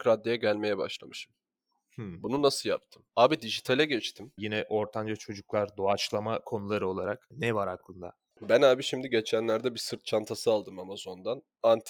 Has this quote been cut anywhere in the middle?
yes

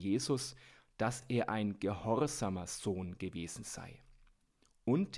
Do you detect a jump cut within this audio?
no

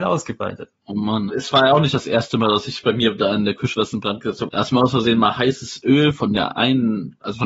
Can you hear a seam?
yes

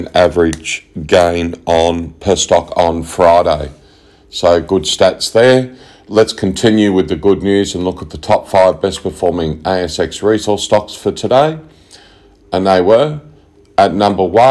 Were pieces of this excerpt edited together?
no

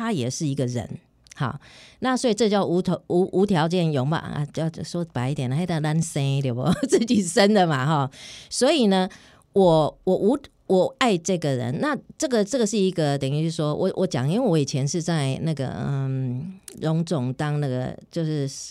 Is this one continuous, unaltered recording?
yes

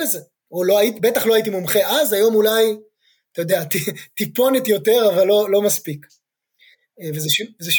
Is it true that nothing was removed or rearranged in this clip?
yes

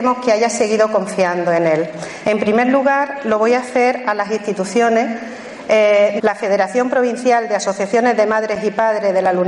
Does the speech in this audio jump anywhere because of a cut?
yes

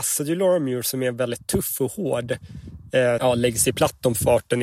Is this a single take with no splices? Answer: no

